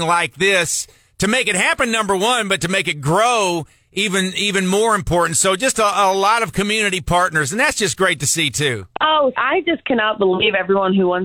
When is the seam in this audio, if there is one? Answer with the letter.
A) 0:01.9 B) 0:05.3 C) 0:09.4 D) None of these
C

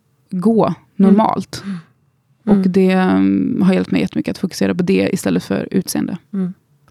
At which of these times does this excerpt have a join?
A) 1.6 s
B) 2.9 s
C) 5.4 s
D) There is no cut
D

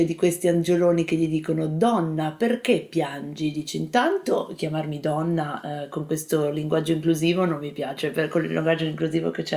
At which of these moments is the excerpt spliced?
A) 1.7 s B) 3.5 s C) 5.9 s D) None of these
D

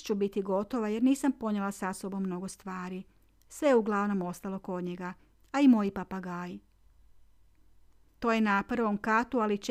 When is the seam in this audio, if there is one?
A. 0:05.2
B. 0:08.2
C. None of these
B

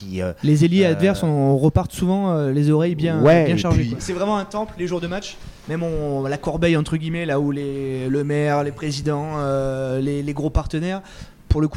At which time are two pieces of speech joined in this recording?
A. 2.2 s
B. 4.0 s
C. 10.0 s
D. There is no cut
B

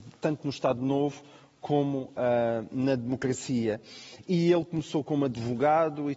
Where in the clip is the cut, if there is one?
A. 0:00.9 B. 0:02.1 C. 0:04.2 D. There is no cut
D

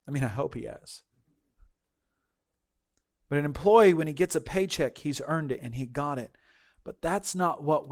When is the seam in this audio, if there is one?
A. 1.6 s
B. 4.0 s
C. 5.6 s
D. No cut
C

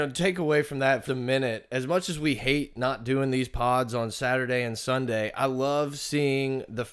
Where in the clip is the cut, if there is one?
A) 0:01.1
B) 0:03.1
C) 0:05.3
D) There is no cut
A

